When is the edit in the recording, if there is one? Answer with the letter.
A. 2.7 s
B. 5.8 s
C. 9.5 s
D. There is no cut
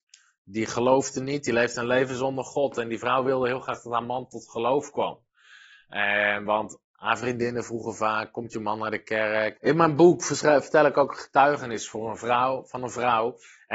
C